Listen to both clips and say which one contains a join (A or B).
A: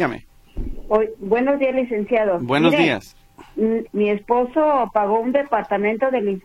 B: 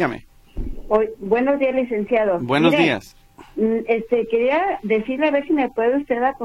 A